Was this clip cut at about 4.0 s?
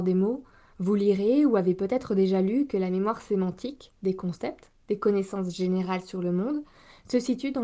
yes; 1 cut; at 4.0 s

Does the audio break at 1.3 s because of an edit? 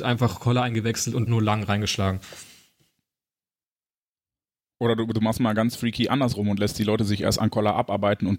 yes; 1 cut; at 1.3 s

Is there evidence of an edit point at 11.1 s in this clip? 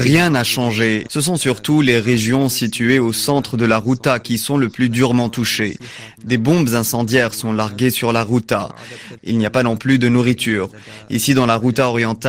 no; 3 cuts; at 1.1 s, 6.2 s, 9.2 s

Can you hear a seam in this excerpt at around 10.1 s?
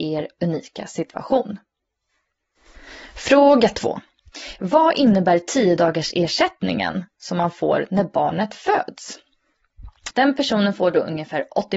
yes; 1 cut; at 10.1 s

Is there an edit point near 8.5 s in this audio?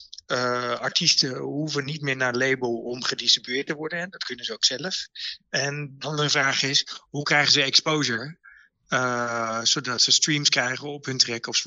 no; 0 cuts

